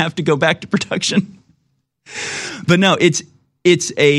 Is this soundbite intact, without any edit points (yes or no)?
yes